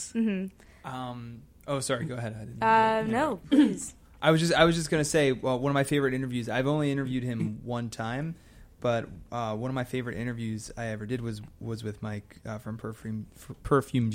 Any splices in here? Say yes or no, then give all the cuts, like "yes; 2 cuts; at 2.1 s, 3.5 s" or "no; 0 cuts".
no; 0 cuts